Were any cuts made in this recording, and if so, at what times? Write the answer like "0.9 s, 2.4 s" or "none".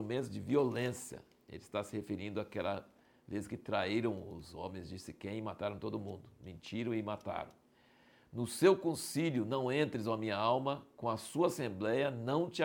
none